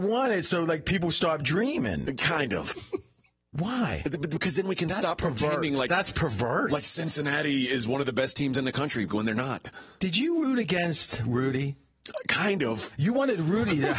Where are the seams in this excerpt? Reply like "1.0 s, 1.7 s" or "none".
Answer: 2.7 s

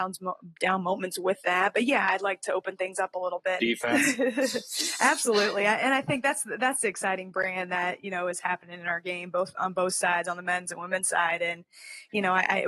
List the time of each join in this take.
3.6 s

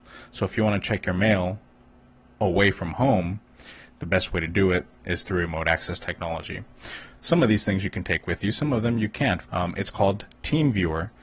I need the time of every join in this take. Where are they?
7.2 s, 9.4 s

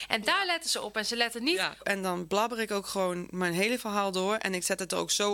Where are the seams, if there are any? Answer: 1.8 s

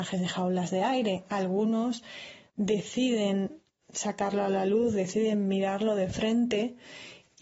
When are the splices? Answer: none

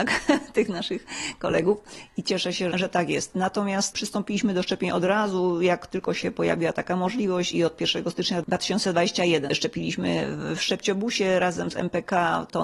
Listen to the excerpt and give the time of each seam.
2.7 s, 9.5 s

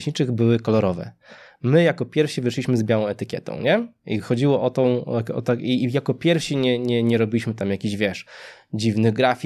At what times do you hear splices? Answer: none

